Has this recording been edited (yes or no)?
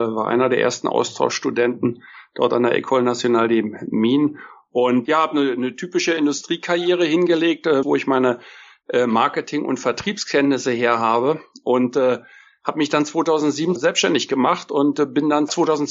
yes